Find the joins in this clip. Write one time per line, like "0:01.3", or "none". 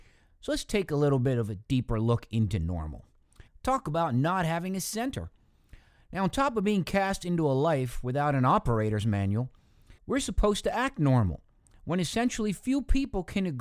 0:03.5
0:10.0